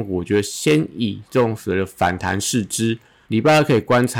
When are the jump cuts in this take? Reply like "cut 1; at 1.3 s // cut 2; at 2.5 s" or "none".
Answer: cut 1; at 3.2 s